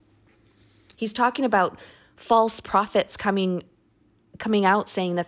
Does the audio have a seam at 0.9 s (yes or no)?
yes